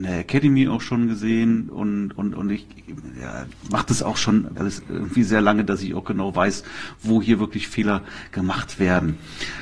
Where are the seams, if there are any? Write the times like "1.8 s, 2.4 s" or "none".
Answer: 1.7 s, 4.6 s